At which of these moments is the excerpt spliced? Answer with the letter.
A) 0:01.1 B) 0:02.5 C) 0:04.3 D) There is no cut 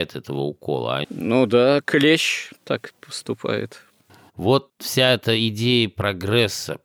C